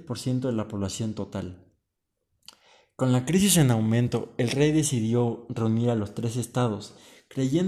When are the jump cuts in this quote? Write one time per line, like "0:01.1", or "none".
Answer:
none

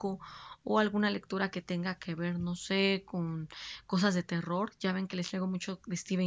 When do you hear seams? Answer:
none

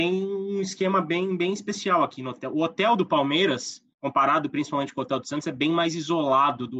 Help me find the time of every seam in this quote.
0:03.9

